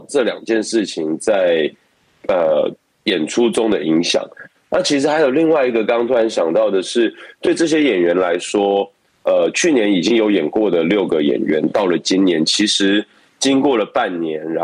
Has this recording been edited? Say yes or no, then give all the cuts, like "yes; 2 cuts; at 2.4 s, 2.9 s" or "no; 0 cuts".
no; 0 cuts